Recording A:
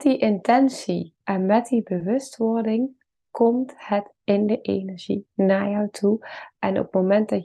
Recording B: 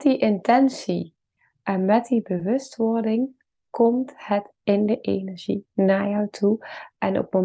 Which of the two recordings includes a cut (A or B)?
A